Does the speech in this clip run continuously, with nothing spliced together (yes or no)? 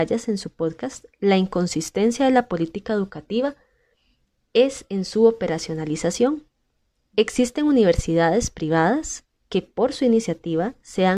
yes